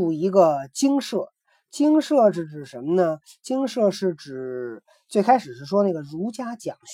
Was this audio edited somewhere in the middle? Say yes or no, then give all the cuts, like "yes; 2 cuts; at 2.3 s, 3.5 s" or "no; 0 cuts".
no; 0 cuts